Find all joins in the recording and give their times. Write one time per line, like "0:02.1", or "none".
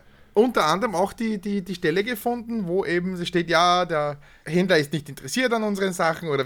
0:04.4